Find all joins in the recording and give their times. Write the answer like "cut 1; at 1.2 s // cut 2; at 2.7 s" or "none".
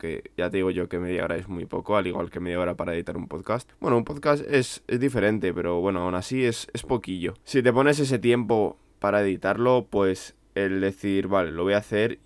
none